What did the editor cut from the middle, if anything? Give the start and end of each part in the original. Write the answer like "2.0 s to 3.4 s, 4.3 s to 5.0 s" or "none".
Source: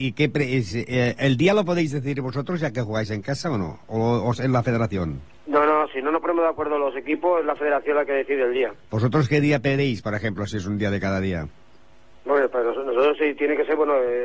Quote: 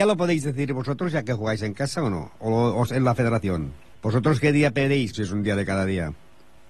5.4 s to 8.8 s, 10.0 s to 10.5 s